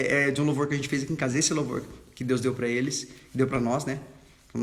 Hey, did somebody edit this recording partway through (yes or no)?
no